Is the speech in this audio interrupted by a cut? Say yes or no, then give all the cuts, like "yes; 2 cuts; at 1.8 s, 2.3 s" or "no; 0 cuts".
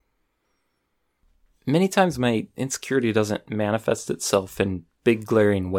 no; 0 cuts